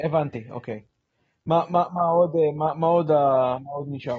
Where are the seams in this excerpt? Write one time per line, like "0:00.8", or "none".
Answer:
none